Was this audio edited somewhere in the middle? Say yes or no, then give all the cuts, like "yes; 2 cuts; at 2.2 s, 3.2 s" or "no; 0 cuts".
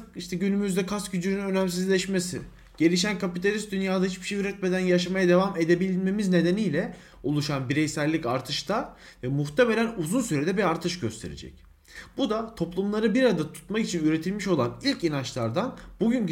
no; 0 cuts